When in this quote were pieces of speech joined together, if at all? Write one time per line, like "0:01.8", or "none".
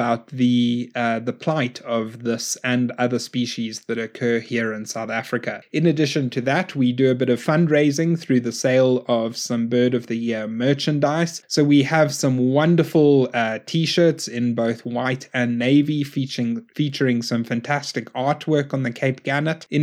none